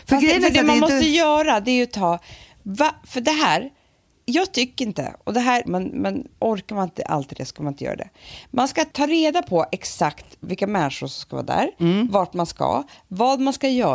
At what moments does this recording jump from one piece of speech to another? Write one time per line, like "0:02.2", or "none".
0:05.7